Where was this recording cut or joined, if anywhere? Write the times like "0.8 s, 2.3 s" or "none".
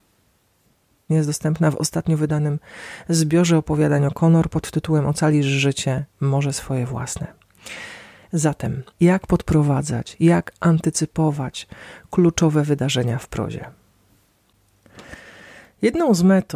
1.1 s, 8.9 s